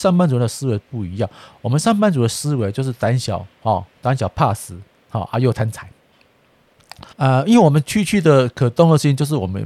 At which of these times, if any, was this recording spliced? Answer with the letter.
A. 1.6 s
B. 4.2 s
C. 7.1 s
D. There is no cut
C